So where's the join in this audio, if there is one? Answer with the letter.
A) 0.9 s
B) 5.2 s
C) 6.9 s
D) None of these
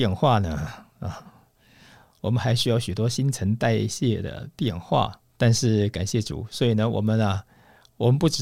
B